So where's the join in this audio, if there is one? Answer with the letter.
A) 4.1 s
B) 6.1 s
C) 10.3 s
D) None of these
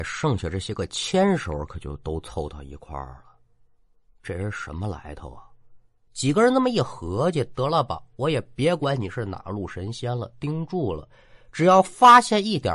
B